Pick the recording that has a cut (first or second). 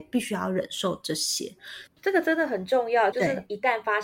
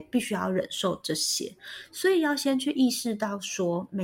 first